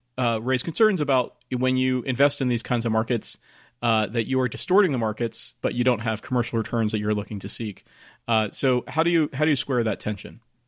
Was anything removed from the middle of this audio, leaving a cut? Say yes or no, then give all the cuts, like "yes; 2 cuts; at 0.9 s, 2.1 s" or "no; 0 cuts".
no; 0 cuts